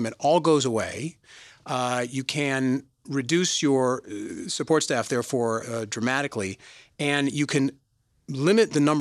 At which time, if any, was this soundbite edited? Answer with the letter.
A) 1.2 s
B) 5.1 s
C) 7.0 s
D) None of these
D